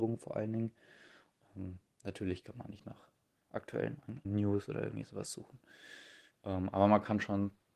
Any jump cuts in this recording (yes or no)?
yes